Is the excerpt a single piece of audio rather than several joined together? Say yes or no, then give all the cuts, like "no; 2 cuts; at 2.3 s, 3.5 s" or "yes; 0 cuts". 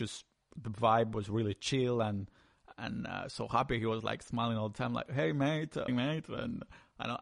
no; 1 cut; at 5.9 s